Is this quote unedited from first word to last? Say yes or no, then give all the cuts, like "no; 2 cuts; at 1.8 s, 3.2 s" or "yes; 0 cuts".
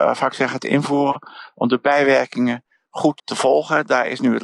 no; 1 cut; at 3.2 s